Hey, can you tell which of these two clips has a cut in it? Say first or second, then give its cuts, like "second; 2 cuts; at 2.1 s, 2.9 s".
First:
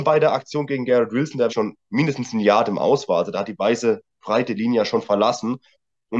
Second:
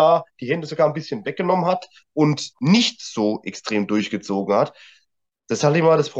first; 1 cut; at 1.5 s